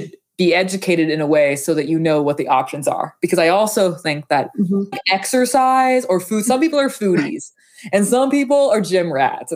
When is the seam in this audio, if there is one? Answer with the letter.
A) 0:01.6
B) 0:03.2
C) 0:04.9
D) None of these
C